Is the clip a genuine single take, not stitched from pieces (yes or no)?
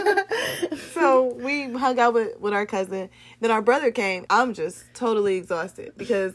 no